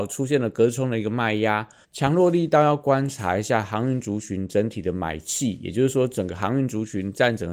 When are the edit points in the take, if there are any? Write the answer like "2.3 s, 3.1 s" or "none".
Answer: 1.8 s